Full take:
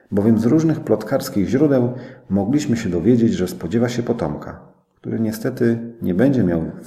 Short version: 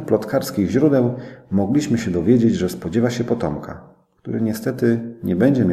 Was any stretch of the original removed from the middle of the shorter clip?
no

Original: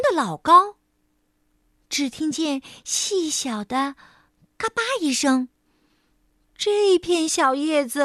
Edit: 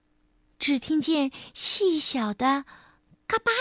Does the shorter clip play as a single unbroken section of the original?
yes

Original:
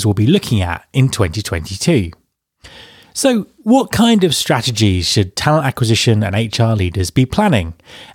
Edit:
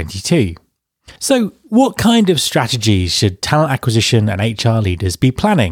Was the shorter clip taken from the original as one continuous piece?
no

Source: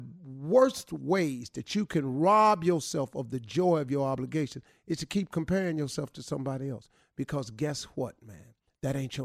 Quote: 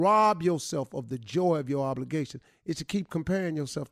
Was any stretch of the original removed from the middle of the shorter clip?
no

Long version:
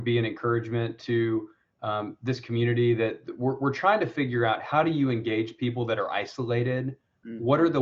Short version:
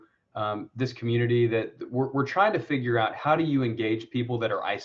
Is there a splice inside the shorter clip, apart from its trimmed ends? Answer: no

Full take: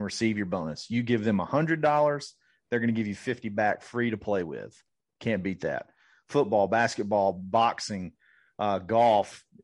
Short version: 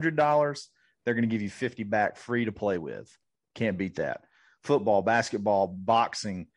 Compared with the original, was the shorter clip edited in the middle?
no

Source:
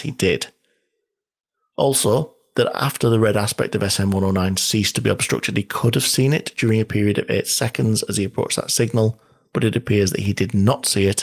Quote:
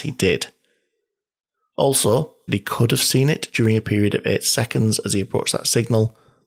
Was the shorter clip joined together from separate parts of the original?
yes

